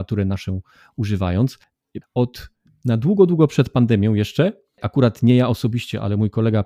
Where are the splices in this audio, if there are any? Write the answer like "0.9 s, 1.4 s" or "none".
2.0 s